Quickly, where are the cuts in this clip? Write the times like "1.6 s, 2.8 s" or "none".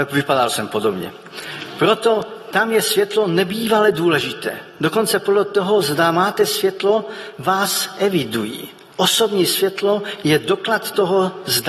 none

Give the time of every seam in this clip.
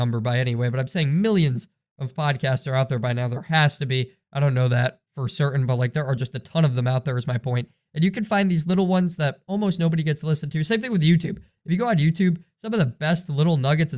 none

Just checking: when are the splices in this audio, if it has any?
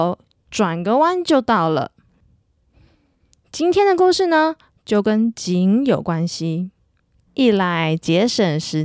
7.3 s

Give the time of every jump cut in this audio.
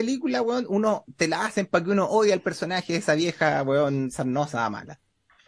none

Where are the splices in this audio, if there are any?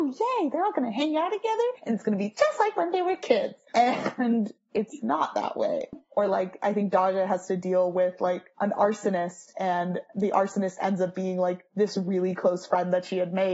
5.9 s

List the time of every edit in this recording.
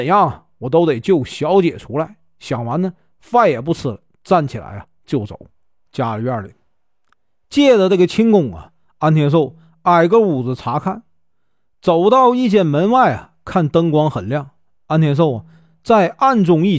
5.9 s

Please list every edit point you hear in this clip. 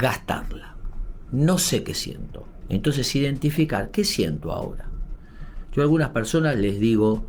1.3 s, 2.6 s

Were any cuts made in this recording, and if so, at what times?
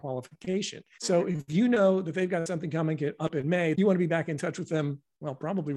1.0 s, 3.7 s

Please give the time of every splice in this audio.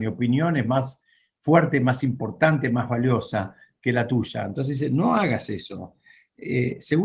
none

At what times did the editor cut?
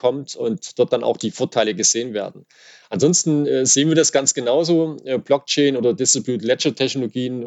none

